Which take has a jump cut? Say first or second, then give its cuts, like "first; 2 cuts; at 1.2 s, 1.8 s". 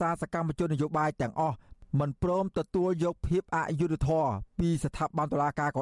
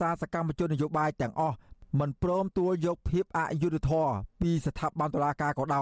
second; 1 cut; at 2.5 s